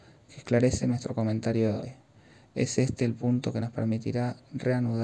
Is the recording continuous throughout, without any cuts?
yes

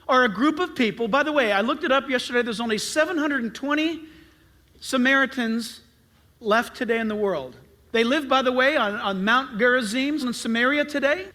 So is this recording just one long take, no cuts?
no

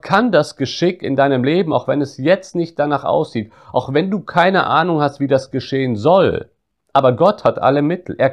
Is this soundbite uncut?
yes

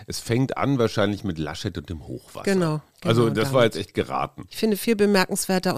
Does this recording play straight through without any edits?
no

